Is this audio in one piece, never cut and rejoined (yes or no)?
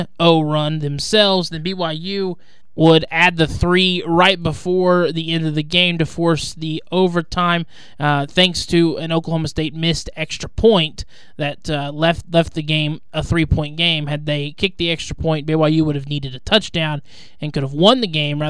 yes